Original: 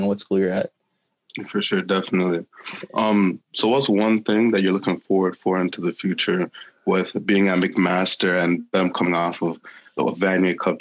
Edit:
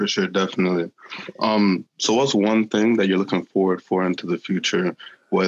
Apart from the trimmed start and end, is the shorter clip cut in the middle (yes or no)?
no